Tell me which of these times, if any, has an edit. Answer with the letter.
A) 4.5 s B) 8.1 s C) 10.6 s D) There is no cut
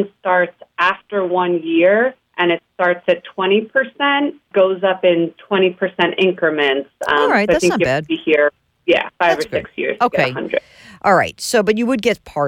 A